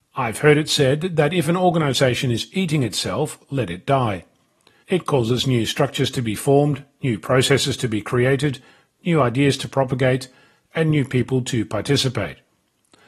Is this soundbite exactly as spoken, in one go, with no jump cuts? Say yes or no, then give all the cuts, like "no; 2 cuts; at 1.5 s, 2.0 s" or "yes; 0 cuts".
no; 1 cut; at 4.8 s